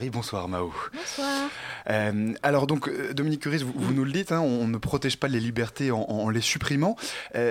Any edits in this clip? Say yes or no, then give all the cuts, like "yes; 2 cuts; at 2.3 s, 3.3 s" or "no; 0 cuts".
no; 0 cuts